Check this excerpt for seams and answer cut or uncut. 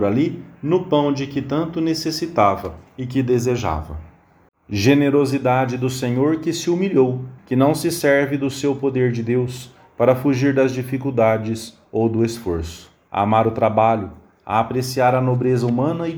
cut